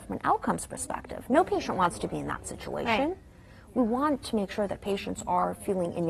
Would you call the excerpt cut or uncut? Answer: uncut